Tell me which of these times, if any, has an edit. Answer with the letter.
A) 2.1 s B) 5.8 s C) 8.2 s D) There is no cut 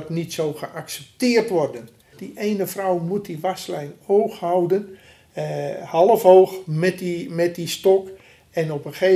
A